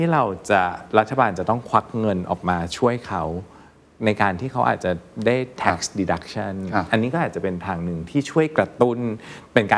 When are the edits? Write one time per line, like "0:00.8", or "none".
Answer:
none